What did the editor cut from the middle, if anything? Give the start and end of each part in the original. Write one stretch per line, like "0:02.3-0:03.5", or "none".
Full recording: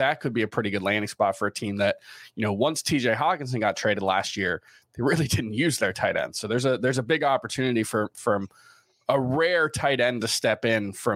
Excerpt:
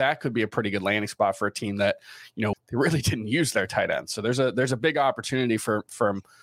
0:02.5-0:04.8